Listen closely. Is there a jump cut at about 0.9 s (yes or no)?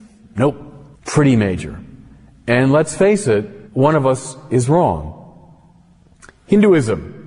yes